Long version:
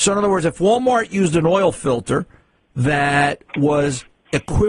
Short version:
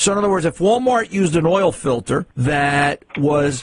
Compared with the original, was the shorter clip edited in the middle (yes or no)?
yes